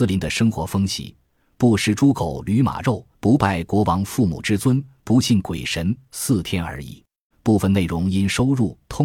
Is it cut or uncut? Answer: cut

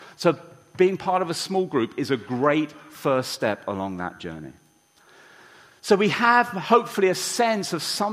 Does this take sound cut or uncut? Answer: uncut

